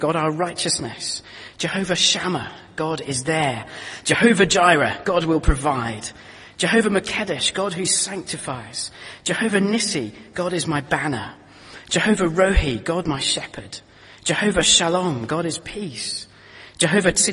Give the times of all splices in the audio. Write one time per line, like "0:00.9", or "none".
0:04.0
0:06.5